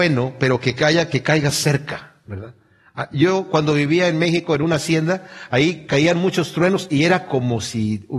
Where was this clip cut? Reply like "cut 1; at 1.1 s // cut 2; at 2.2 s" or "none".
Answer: none